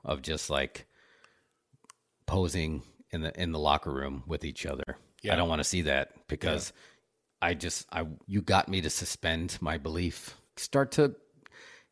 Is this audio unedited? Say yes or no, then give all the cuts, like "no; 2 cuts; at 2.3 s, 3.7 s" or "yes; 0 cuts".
no; 2 cuts; at 8.2 s, 10.5 s